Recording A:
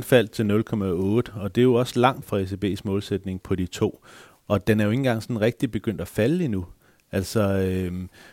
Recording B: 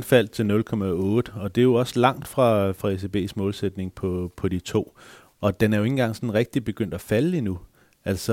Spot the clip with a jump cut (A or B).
A